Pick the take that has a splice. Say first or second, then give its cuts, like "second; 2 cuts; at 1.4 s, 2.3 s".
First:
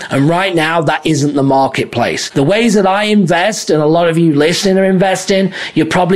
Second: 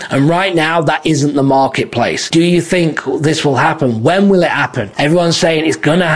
second; 1 cut; at 2.3 s